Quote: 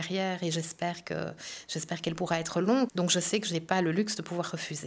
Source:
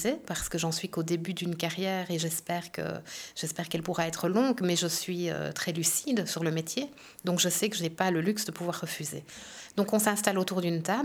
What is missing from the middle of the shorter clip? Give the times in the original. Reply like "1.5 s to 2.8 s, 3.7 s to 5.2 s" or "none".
4.6 s to 7.2 s